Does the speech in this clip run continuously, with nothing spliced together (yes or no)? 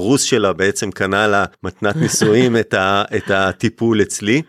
no